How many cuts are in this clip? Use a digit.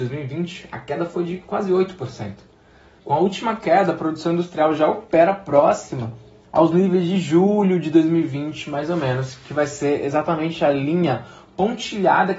1